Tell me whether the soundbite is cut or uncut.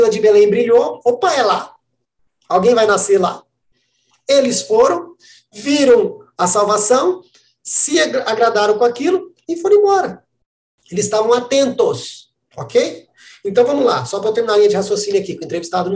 uncut